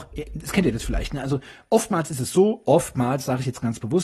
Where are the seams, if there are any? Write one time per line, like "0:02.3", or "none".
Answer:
none

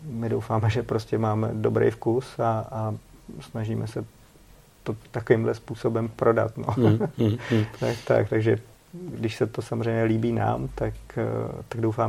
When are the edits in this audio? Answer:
none

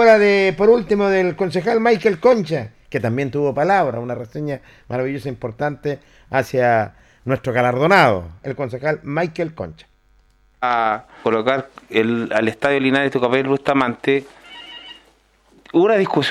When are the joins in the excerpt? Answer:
0:08.4
0:11.2

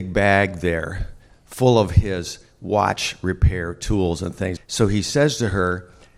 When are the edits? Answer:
0:04.6

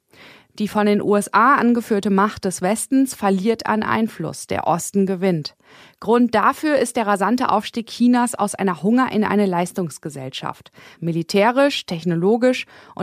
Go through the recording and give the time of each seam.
0:10.9

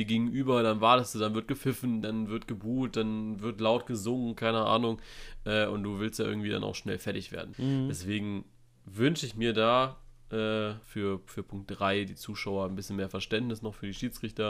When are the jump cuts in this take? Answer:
0:07.5
0:10.8

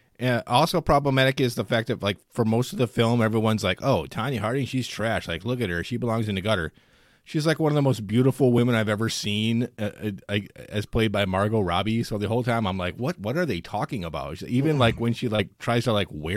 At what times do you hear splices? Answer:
none

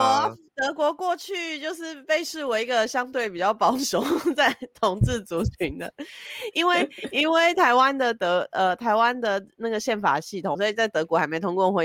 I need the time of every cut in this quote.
0:10.5

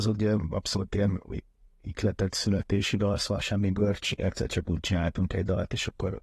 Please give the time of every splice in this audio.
none

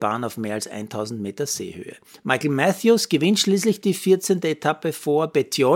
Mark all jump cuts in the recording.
none

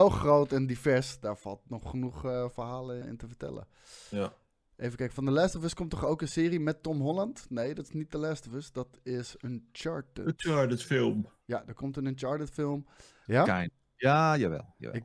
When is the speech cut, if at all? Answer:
0:03.0
0:13.3

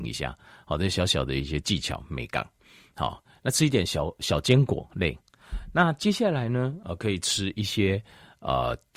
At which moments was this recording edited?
none

